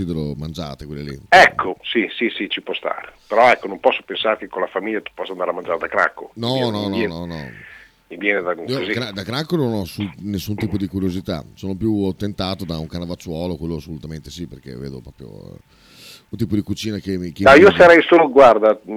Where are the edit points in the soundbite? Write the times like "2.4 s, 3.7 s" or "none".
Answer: 1.7 s